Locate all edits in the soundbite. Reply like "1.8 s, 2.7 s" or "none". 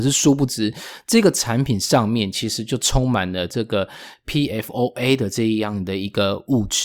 none